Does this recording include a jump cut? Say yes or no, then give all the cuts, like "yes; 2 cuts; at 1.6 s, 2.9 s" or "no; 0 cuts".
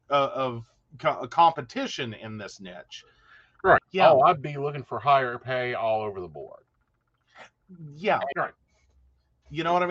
yes; 2 cuts; at 3.8 s, 8.3 s